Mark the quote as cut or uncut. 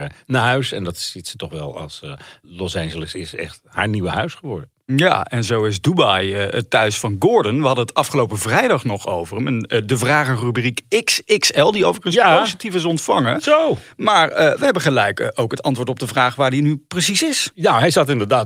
uncut